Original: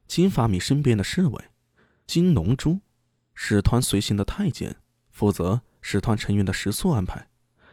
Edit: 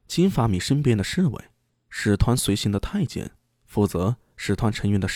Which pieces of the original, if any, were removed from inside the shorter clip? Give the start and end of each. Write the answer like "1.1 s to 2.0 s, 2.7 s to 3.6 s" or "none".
1.7 s to 3.1 s